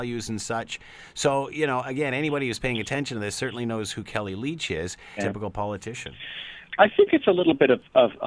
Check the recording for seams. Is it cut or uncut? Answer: cut